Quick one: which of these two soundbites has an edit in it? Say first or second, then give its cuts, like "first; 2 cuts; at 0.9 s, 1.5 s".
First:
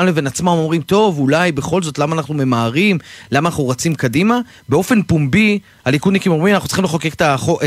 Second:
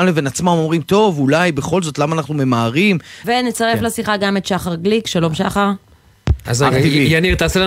second; 2 cuts; at 3.2 s, 6.4 s